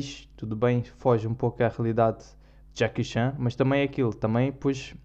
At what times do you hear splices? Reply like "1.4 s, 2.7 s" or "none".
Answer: none